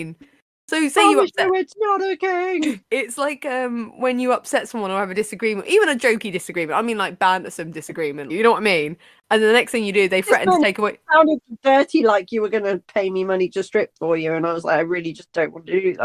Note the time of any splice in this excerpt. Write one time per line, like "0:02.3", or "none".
0:08.3